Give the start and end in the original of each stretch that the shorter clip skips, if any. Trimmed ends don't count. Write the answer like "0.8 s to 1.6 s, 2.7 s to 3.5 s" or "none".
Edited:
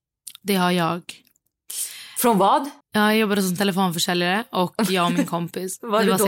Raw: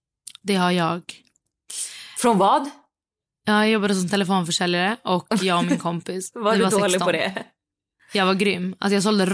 2.8 s to 3.3 s